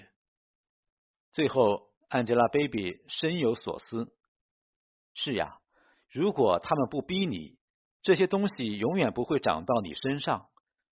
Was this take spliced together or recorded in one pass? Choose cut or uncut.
uncut